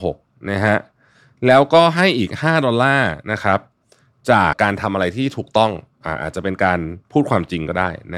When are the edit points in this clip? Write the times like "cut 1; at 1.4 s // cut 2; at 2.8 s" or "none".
cut 1; at 4.5 s